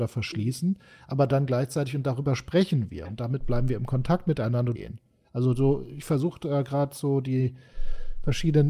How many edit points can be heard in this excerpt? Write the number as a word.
one